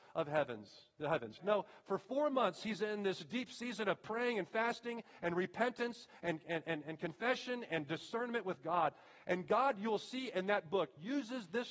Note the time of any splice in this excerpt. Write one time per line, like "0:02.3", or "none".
0:01.4